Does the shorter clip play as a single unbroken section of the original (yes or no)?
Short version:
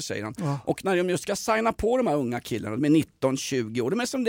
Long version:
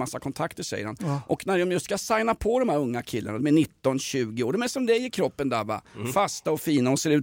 yes